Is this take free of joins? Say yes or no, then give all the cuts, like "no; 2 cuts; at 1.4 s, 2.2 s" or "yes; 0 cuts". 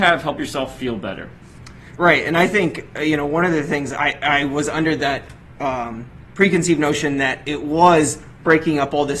yes; 0 cuts